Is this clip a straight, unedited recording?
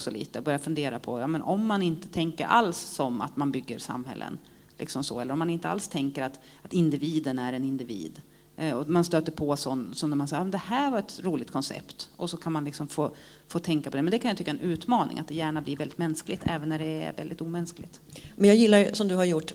yes; 0 cuts

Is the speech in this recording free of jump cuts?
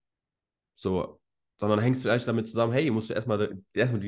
yes; 0 cuts

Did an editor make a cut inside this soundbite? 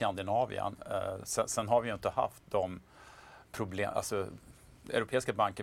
yes; 1 cut; at 3.5 s

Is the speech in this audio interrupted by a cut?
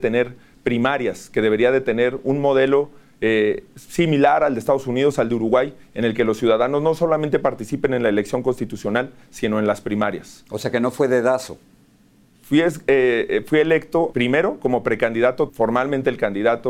yes; 3 cuts; at 12.4 s, 14.1 s, 15.5 s

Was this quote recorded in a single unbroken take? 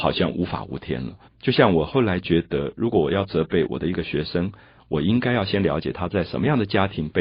no; 1 cut; at 1.2 s

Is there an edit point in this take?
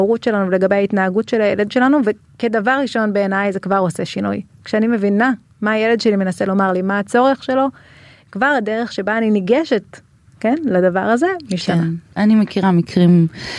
no; 0 cuts

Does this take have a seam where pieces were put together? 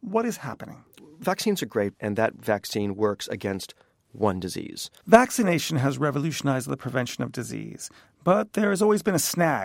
yes; 2 cuts; at 2.0 s, 5.0 s

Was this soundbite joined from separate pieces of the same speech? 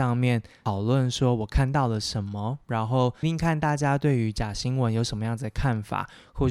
yes; 1 cut; at 3.2 s

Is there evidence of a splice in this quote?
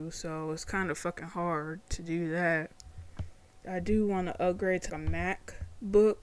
yes; 2 cuts; at 3.6 s, 4.9 s

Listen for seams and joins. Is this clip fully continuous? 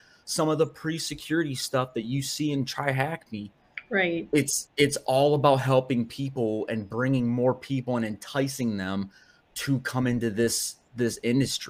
yes; 0 cuts

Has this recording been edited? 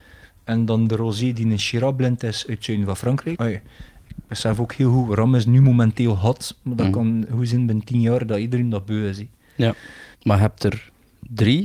yes; 2 cuts; at 3.3 s, 10.1 s

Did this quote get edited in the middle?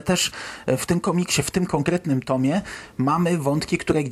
no; 0 cuts

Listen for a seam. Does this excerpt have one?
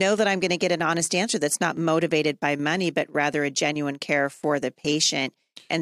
no; 0 cuts

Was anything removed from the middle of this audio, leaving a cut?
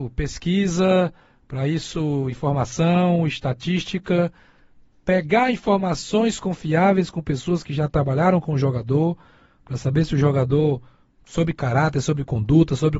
no; 0 cuts

